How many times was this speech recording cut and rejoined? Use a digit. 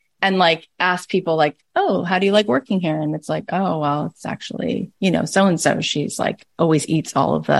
0